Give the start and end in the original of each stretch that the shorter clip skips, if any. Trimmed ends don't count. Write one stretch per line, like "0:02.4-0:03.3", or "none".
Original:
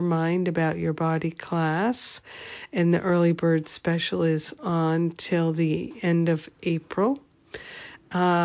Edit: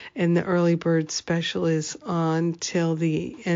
none